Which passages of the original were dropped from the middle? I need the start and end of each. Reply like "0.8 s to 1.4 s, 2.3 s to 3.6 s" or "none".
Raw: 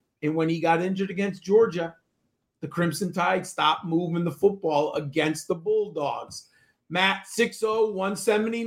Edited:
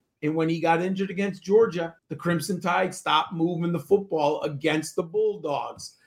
2.0 s to 2.5 s